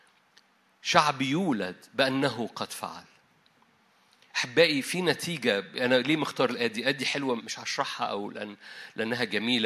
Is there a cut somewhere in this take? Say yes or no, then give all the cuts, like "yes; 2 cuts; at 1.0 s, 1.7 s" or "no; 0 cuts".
yes; 1 cut; at 7.4 s